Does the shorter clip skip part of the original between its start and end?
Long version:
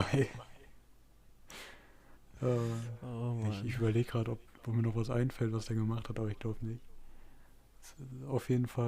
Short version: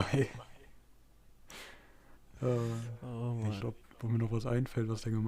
yes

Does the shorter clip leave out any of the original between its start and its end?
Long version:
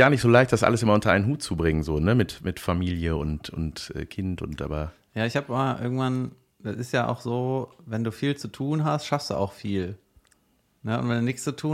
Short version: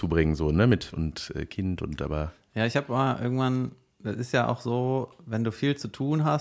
yes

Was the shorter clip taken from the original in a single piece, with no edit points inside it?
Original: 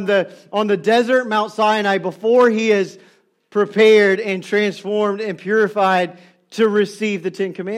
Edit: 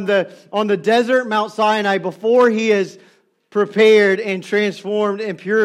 yes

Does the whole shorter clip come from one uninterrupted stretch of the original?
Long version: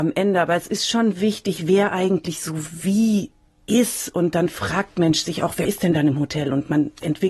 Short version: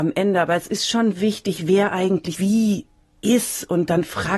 no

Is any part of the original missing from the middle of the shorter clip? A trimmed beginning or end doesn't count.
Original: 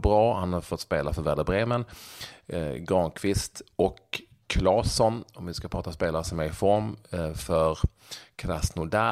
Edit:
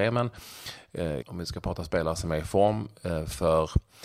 yes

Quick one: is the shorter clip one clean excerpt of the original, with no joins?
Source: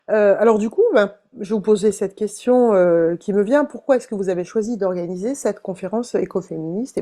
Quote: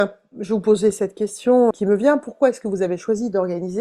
no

